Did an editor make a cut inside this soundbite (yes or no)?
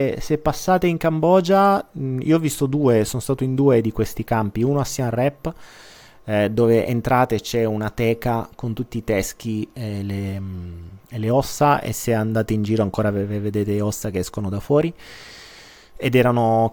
no